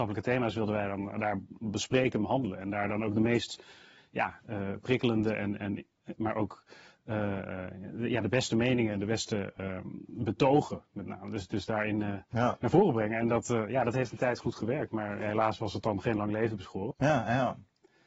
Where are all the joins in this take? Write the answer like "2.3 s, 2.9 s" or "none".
16.9 s